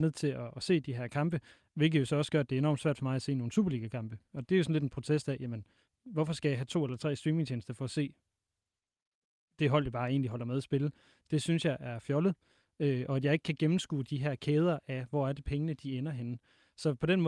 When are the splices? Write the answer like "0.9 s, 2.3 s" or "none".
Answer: 1.7 s